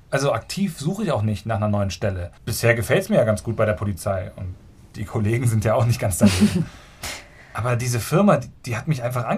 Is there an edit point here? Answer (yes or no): yes